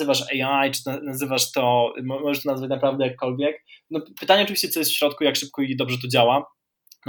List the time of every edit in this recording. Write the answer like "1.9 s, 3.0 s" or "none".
none